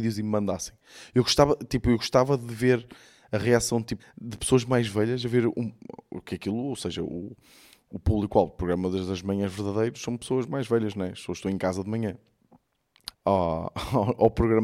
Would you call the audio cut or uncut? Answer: cut